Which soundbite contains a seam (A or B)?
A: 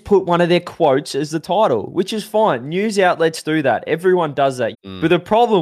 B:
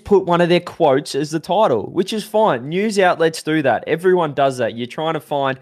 A